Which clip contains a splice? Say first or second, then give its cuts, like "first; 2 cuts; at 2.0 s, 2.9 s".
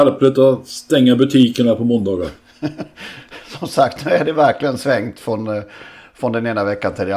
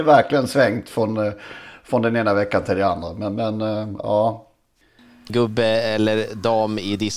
second; 1 cut; at 5.3 s